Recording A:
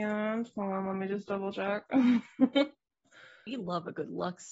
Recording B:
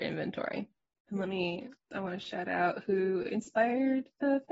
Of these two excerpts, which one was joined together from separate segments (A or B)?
B